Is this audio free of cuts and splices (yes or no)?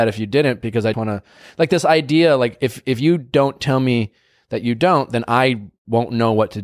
no